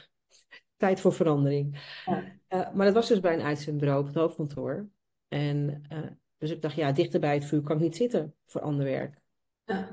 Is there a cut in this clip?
no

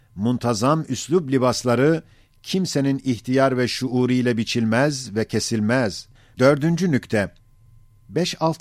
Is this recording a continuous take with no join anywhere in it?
no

